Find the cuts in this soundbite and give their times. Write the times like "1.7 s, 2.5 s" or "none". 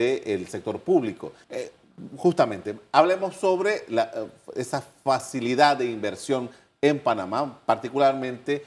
1.4 s